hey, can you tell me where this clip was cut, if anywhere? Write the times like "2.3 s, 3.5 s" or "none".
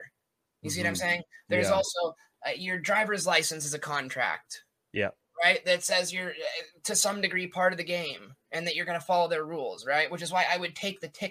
none